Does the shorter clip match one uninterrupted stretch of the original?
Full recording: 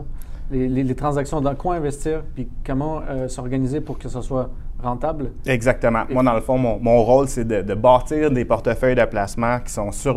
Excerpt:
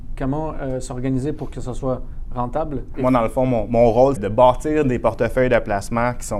no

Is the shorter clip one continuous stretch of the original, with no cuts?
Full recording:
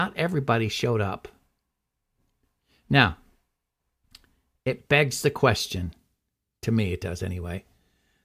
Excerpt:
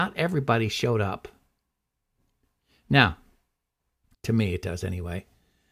no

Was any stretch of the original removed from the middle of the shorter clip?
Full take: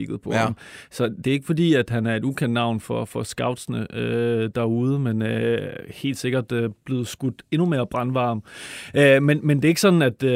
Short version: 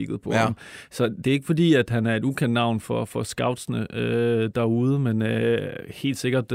no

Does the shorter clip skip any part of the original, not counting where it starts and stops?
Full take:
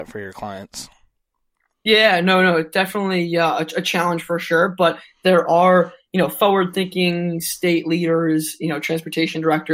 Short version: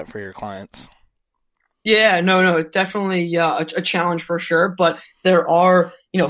no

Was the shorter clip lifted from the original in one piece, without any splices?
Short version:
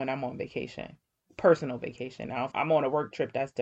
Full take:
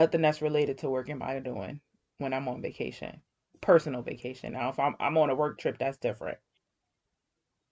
no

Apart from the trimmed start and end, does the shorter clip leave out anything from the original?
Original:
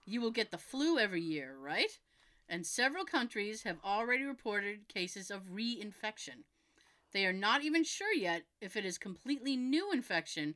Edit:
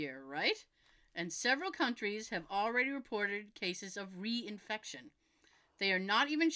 no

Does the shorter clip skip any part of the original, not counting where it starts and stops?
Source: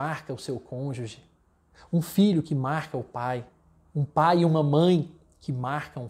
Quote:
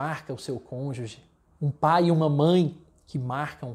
yes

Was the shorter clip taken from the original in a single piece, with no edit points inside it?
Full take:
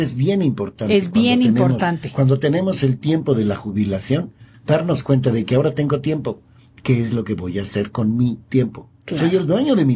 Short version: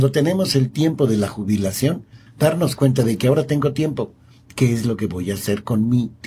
yes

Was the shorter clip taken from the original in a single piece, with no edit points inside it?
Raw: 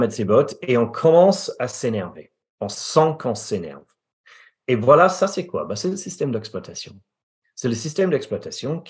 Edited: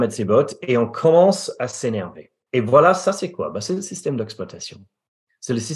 no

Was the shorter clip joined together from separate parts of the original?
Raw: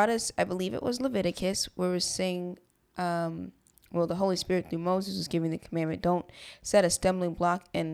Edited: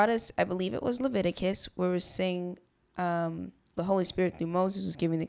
yes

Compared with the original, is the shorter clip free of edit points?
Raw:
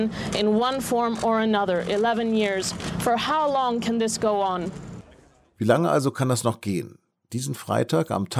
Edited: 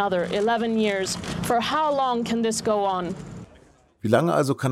yes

